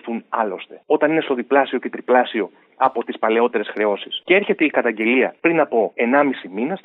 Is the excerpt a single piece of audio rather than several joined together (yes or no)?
yes